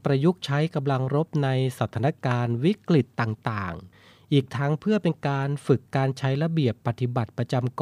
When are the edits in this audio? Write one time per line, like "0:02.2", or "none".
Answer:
none

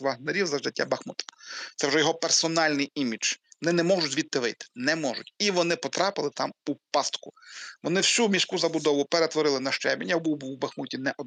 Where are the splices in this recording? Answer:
none

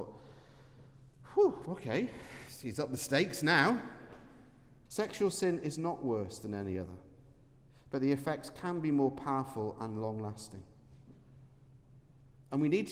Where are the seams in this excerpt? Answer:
0:04.9

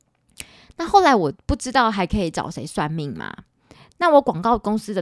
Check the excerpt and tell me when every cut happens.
none

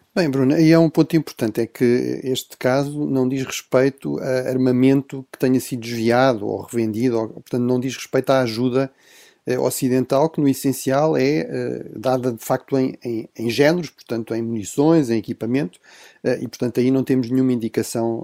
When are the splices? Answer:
none

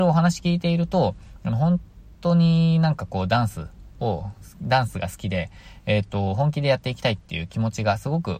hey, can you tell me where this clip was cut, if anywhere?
none

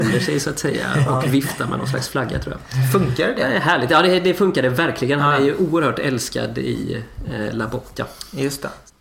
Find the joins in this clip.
none

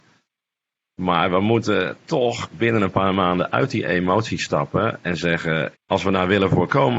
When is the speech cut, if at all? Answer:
0:05.7

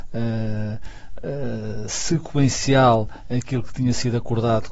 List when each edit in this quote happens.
none

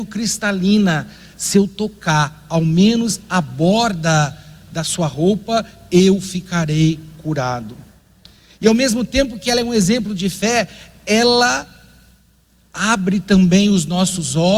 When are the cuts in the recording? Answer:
none

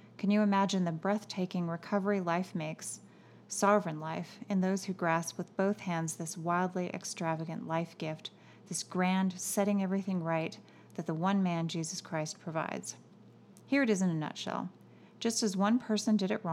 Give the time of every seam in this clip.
none

